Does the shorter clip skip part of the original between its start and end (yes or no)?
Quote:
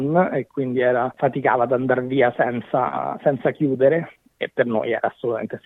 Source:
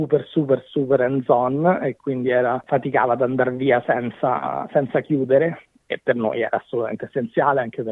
no